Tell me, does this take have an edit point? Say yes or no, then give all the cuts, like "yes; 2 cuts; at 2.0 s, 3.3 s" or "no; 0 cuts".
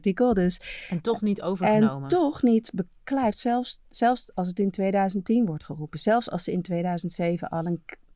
no; 0 cuts